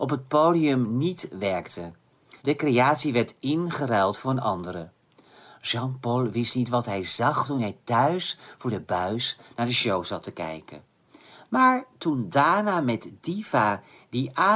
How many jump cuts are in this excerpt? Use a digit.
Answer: 1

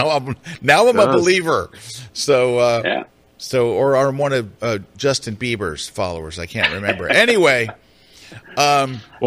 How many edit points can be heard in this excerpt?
1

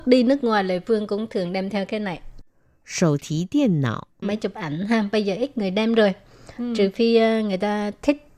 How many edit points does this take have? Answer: 1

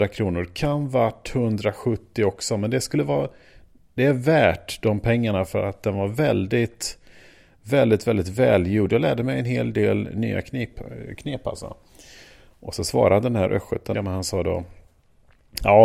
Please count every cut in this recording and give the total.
1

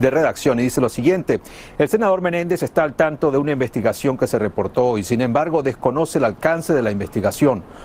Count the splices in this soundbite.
0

